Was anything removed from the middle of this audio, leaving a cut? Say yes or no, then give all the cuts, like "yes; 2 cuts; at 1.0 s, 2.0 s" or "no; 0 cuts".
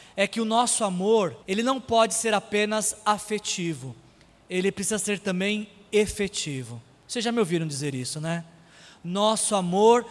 yes; 1 cut; at 1.4 s